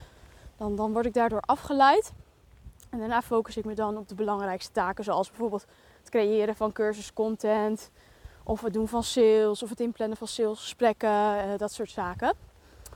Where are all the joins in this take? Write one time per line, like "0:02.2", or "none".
none

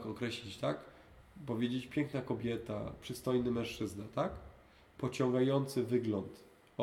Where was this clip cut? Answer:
none

